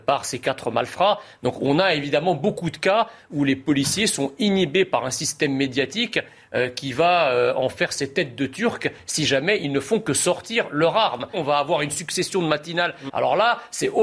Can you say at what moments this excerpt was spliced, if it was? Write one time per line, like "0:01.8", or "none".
0:11.3
0:13.1